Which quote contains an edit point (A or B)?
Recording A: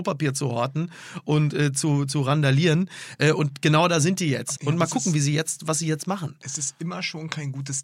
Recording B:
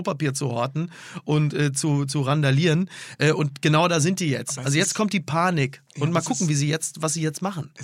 A